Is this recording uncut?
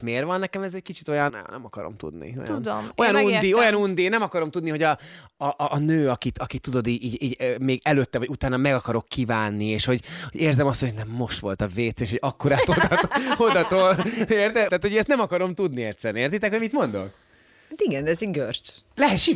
no; 2 cuts; at 1.3 s, 14.7 s

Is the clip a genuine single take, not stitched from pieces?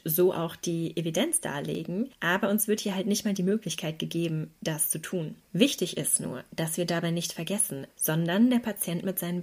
no; 2 cuts; at 5.4 s, 7.9 s

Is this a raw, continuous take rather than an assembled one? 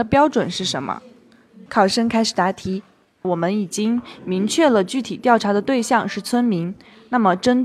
no; 2 cuts; at 1.7 s, 3.2 s

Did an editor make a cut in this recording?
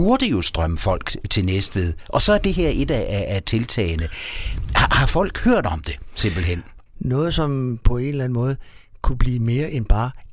yes; 1 cut; at 6.9 s

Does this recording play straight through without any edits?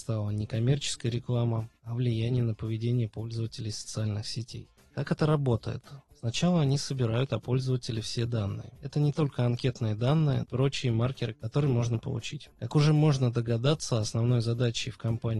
no; 2 cuts; at 10.4 s, 12.5 s

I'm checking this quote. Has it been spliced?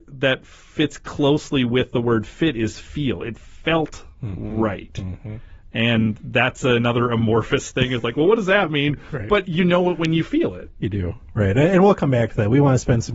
no; 0 cuts

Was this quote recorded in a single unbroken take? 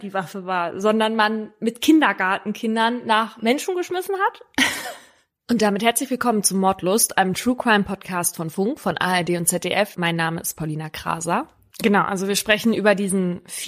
no; 2 cuts; at 9.9 s, 11.7 s

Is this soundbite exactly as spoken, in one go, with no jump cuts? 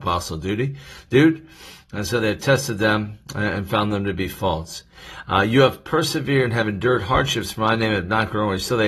yes; 0 cuts

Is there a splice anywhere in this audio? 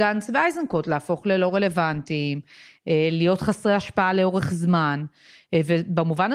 no; 0 cuts

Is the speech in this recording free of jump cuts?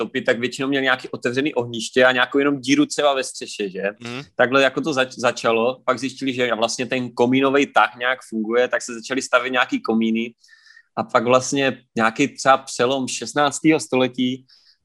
yes; 0 cuts

